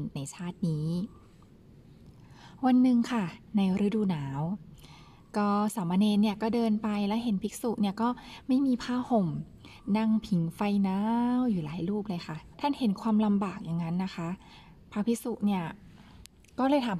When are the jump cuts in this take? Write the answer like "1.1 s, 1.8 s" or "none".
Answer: 12.5 s